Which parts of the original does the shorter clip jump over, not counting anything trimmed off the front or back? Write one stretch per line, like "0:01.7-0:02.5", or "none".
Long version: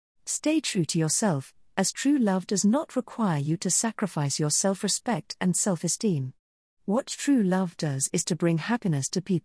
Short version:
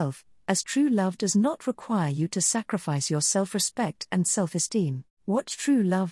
0:06.4-0:06.7